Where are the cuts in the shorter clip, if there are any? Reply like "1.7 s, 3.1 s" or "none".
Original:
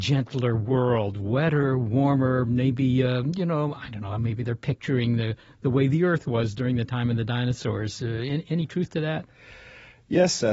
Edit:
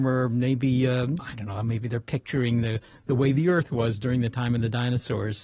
1.2 s